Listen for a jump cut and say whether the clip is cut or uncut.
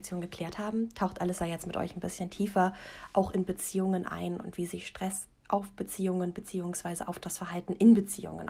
uncut